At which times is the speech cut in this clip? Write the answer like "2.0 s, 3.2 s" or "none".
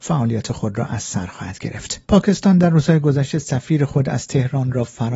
2.0 s